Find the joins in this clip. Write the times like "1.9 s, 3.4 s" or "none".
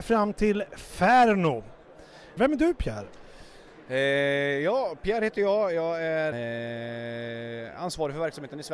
2.4 s, 6.3 s